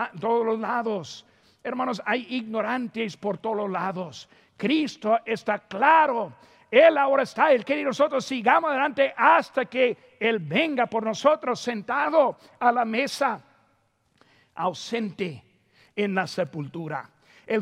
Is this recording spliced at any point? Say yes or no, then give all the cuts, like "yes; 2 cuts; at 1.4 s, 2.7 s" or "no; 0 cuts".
no; 0 cuts